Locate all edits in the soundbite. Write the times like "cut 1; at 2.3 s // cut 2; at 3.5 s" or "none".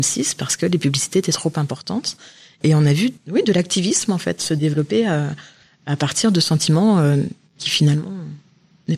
none